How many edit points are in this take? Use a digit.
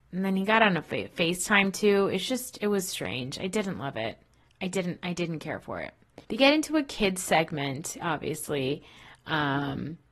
2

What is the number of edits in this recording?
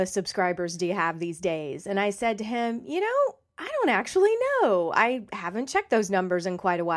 0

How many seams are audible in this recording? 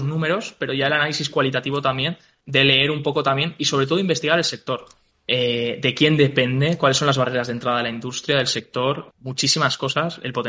2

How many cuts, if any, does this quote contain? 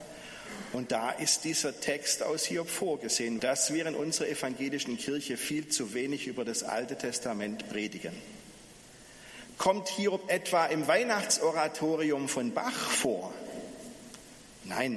2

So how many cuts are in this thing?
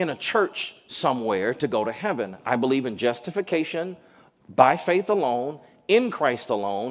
0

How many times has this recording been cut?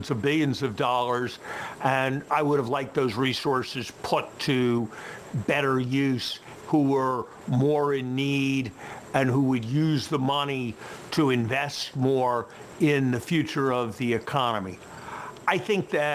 1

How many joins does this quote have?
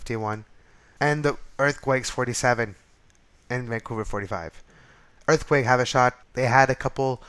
2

